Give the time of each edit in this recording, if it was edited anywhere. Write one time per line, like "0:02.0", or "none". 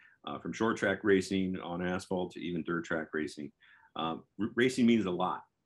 none